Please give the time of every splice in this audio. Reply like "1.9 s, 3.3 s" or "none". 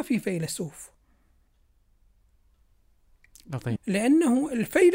3.8 s